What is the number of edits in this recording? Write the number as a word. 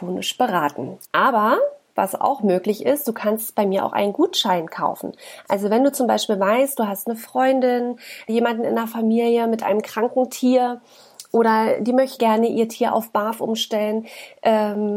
three